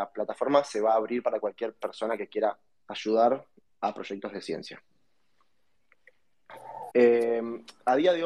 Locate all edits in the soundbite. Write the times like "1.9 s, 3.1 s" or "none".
6.9 s